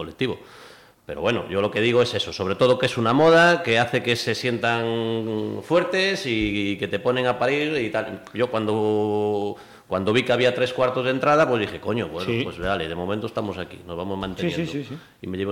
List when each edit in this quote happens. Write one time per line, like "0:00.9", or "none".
none